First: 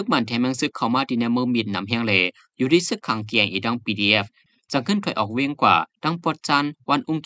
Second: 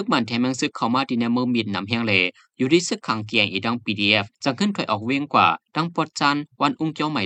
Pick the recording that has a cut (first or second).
second